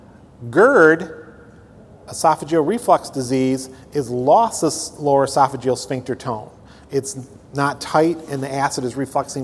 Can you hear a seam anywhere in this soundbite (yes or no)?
no